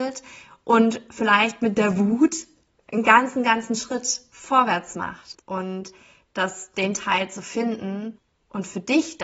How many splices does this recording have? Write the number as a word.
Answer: one